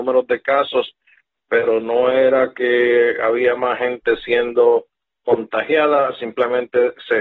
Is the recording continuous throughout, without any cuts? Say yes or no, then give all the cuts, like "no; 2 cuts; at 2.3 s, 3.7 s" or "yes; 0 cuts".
yes; 0 cuts